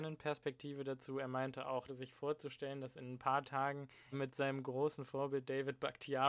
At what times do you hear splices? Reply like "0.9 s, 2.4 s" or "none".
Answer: 1.9 s, 4.1 s